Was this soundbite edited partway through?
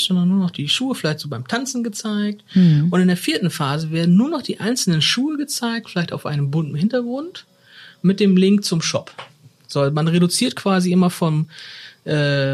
no; 0 cuts

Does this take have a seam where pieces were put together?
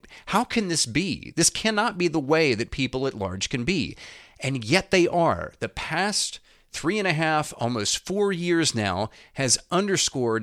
no; 0 cuts

